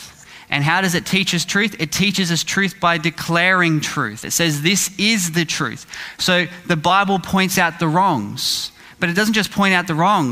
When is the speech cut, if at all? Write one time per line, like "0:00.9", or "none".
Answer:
none